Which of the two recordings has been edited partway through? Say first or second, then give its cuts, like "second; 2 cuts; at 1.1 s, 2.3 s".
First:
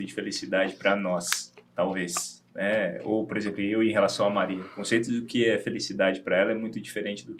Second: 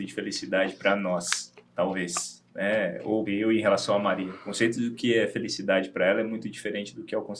second; 1 cut; at 3.3 s